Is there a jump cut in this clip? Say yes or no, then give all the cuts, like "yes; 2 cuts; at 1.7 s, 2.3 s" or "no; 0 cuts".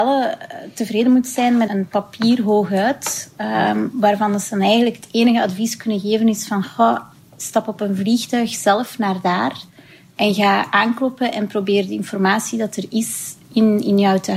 yes; 1 cut; at 1.7 s